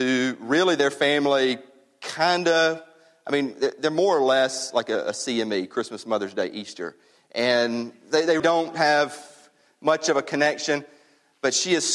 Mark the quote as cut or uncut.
cut